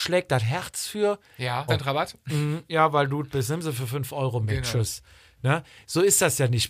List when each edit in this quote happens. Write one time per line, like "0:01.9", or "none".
0:01.7